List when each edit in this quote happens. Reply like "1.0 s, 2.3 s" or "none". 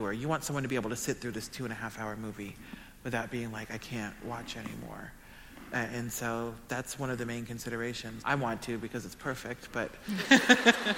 8.2 s, 10.1 s